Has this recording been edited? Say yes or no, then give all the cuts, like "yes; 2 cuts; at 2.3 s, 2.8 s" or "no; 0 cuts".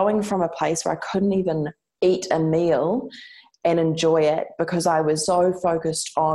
yes; 1 cut; at 5.3 s